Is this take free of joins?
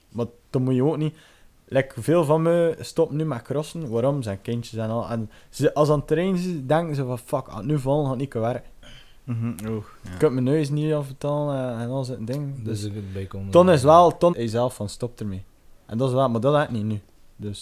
no; 1 cut; at 14.3 s

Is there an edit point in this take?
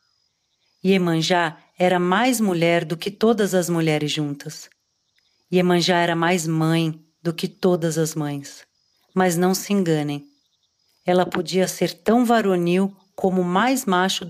no; 0 cuts

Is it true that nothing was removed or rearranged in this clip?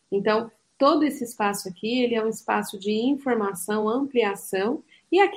yes; 0 cuts

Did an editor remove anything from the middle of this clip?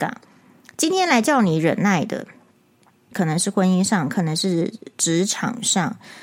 yes; 1 cut; at 3.1 s

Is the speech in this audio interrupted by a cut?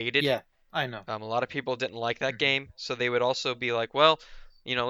no; 0 cuts

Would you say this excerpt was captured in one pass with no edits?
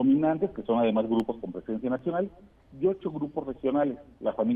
yes; 0 cuts

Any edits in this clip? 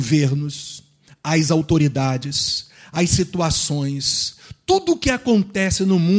no; 0 cuts

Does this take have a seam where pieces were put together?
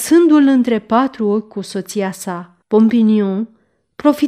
yes; 1 cut; at 2.6 s

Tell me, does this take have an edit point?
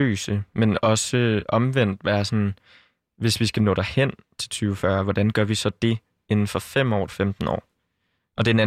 yes; 1 cut; at 7.1 s

